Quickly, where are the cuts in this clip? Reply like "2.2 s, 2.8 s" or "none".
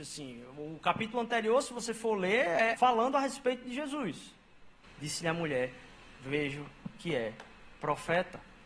2.8 s, 4.8 s, 6.2 s